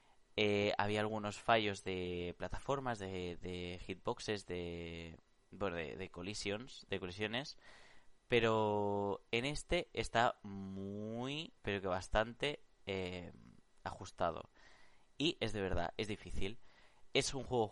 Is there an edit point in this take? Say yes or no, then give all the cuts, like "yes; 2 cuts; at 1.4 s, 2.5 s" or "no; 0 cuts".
yes; 2 cuts; at 11.6 s, 15.2 s